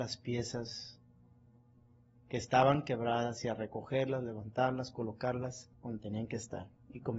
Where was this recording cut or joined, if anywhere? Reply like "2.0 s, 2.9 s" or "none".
5.7 s